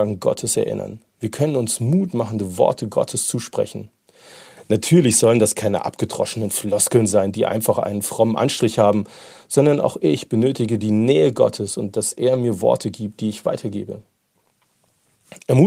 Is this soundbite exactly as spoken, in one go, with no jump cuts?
yes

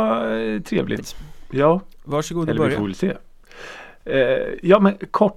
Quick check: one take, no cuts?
no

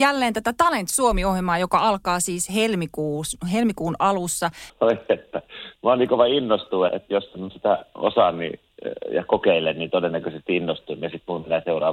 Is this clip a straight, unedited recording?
no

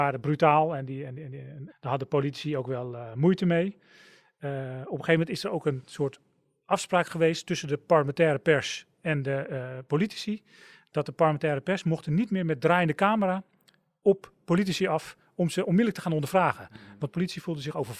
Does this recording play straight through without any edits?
no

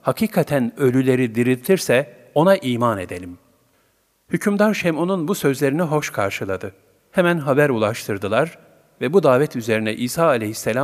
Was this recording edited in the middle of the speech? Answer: no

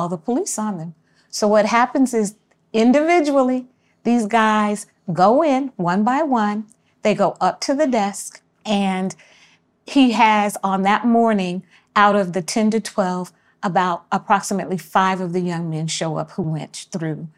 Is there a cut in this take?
yes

